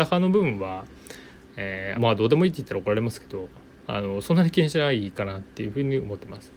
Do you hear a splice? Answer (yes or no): yes